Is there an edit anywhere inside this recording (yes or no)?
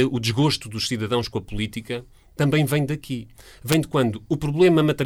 no